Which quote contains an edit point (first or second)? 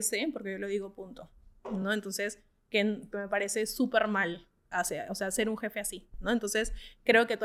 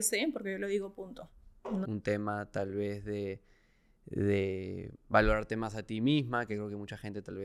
second